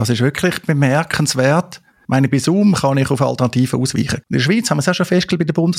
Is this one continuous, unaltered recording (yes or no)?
no